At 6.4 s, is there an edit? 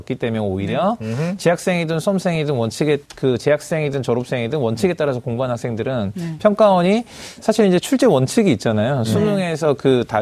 yes; 2 cuts; at 3.0 s, 6.4 s

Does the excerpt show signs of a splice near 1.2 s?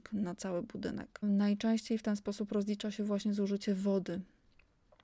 yes; 1 cut; at 1.2 s

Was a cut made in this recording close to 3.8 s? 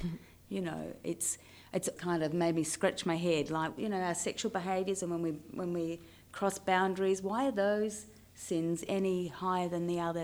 yes; 2 cuts; at 2.0 s, 3.8 s

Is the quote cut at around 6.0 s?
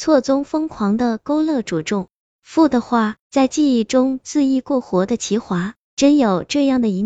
no; 1 cut; at 3.2 s

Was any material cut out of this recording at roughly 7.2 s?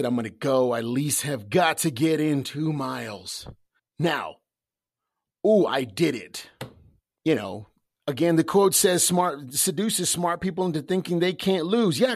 yes; 2 cuts; at 3.8 s, 7.2 s

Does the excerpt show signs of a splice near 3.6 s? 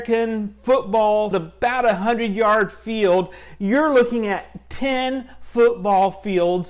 no; 1 cut; at 1.3 s

